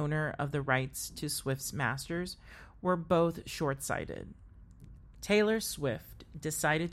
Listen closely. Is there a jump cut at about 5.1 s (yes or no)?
yes